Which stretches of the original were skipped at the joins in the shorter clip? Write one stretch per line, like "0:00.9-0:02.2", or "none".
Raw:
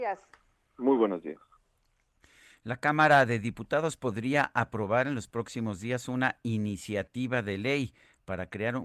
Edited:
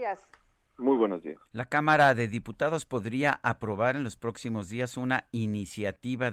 0:01.5-0:02.6